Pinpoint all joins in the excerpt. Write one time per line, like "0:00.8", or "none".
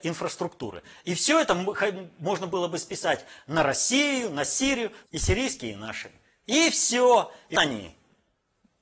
0:05.0
0:07.5